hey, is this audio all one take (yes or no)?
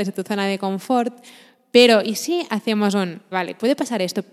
no